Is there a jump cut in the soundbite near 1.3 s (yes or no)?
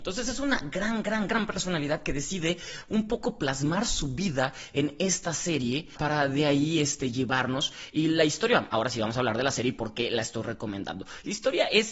yes